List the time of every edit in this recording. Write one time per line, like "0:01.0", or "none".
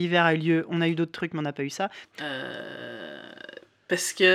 0:02.0